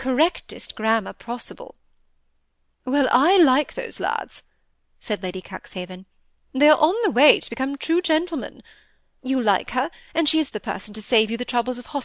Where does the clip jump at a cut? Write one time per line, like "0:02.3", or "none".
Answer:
0:09.2
0:10.5